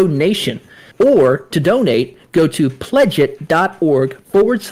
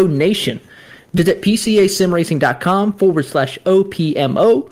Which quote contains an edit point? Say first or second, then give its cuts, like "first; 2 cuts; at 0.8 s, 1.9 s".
first; 1 cut; at 0.9 s